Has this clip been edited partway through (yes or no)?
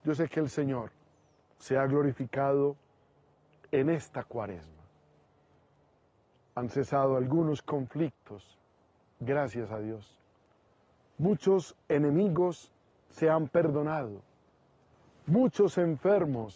no